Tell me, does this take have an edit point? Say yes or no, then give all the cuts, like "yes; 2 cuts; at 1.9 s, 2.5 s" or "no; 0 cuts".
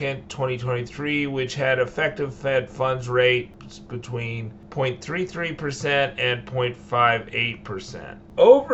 no; 0 cuts